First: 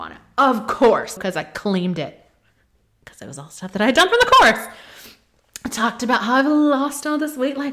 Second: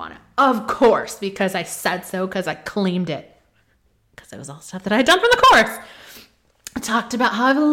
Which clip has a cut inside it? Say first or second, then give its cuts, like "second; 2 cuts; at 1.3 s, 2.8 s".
first; 1 cut; at 1.2 s